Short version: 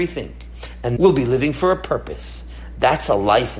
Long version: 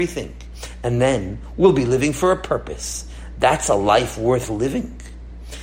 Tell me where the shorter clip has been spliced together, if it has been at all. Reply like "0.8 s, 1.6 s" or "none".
1.0 s